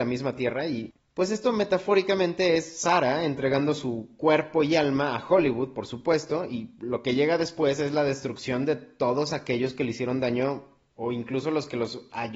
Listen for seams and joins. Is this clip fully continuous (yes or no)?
yes